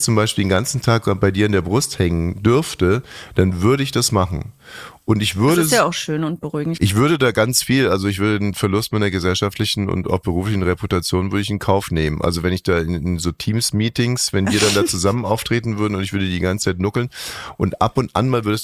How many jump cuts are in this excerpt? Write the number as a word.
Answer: one